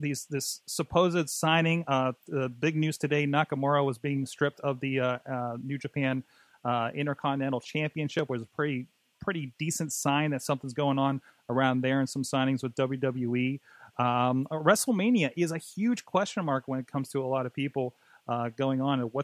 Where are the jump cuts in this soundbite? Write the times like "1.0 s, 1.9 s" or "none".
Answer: none